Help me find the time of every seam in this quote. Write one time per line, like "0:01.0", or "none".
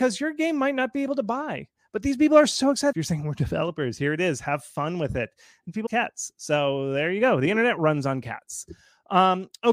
0:02.9
0:05.9